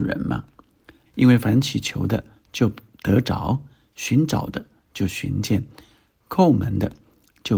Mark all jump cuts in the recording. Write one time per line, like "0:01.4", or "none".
0:01.0